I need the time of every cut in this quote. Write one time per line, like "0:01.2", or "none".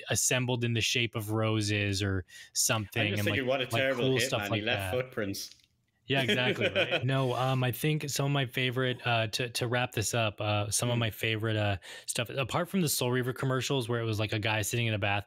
0:07.0